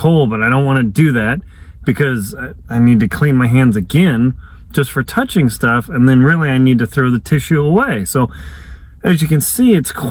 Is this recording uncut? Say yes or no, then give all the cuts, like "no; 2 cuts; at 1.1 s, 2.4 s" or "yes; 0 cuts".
yes; 0 cuts